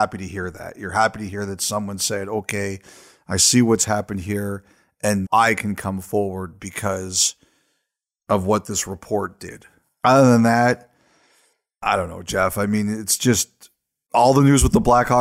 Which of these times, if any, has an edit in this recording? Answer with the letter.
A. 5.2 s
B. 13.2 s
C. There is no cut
A